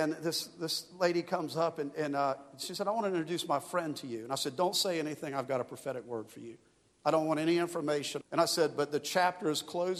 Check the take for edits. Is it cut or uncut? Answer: cut